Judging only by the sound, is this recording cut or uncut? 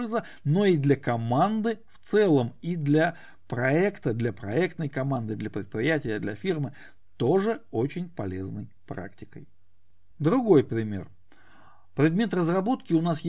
uncut